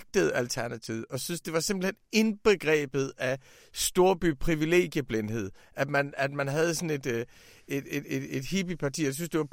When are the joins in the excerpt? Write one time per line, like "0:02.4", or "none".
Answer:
none